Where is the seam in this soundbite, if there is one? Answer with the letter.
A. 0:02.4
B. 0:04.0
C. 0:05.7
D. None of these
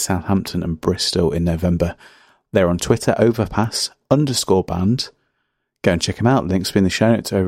D